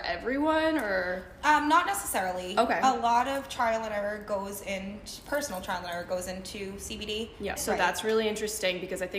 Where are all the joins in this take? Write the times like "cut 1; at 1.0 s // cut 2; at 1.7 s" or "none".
cut 1; at 7.6 s